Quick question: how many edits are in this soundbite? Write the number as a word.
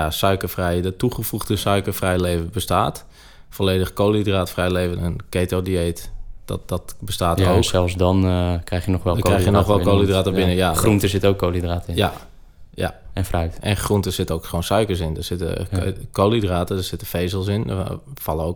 one